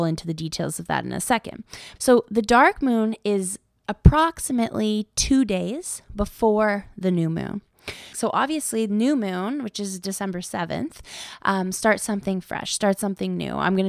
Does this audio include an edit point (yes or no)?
yes